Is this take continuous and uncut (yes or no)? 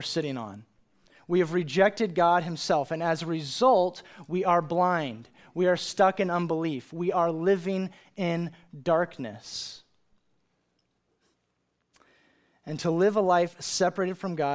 yes